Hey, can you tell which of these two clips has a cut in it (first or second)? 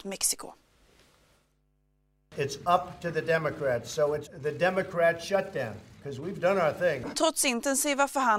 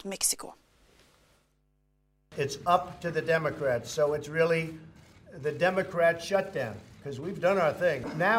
first